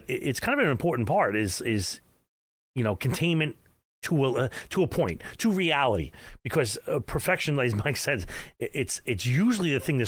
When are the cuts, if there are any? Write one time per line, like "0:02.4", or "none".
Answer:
none